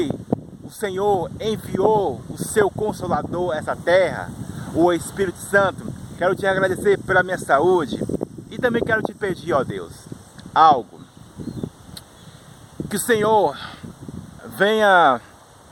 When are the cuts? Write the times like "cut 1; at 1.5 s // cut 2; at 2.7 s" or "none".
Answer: cut 1; at 6.2 s